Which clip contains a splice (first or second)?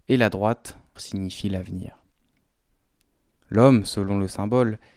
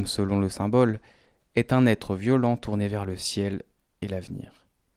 first